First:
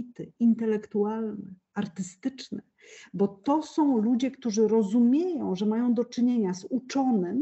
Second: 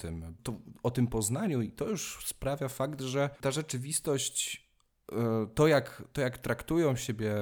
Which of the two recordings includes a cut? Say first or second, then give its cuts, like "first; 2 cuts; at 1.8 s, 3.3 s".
second; 1 cut; at 3.4 s